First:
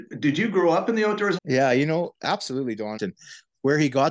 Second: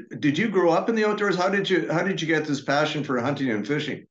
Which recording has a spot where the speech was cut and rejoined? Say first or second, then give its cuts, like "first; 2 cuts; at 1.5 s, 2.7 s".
first; 2 cuts; at 1.4 s, 3.0 s